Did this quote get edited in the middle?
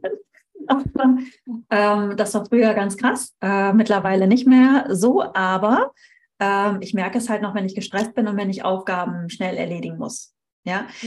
no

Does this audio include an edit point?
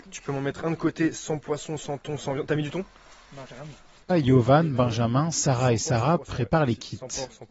yes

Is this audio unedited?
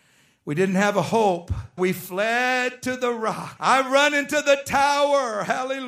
no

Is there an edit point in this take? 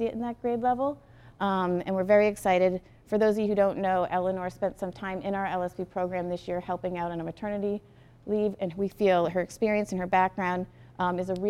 no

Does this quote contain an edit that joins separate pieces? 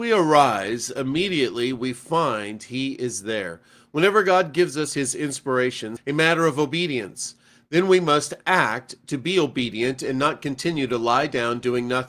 yes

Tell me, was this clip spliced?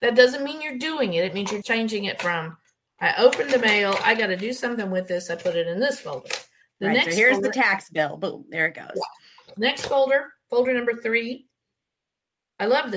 yes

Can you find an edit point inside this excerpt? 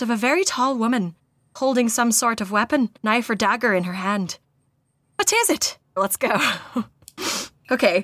yes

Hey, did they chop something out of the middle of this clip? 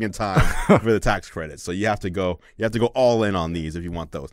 no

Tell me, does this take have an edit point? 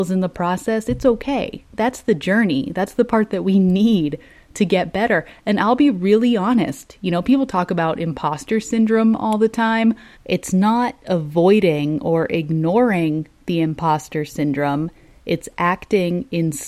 yes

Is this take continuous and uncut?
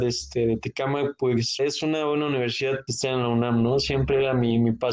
no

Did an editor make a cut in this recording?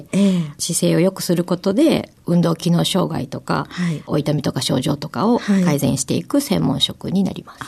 no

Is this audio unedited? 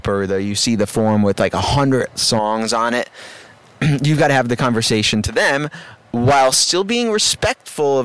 yes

